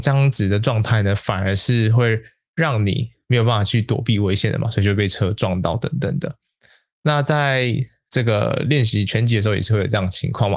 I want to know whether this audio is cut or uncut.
uncut